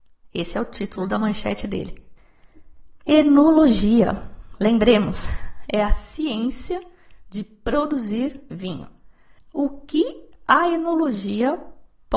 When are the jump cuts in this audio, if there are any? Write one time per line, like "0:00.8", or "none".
0:09.4